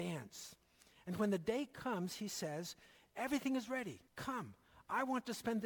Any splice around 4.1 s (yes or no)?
yes